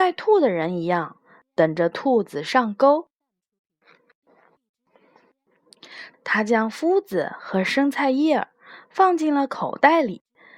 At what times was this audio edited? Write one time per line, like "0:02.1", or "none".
0:06.1